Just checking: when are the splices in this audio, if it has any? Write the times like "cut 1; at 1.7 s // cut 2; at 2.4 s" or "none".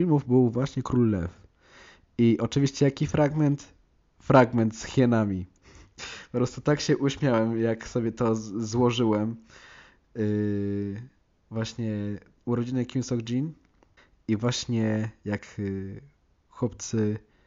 none